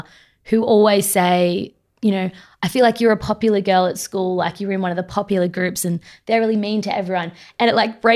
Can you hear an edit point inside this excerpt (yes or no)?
no